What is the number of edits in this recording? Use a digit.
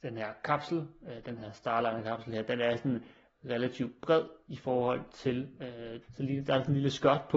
1